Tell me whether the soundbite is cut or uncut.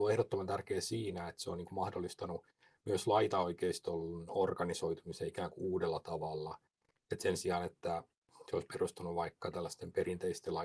uncut